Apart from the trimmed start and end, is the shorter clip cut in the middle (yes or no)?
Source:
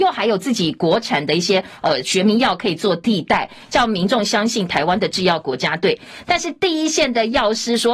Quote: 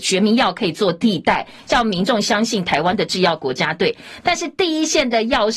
no